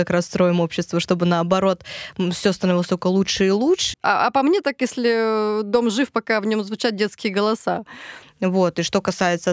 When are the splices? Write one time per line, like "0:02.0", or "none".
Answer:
0:03.9
0:08.2